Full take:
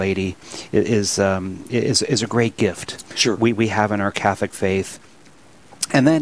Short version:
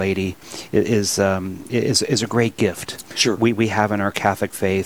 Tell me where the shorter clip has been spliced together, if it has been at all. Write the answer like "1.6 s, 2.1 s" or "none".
none